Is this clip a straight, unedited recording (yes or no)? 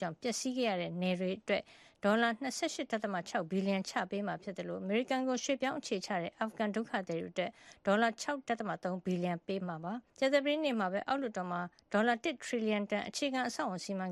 no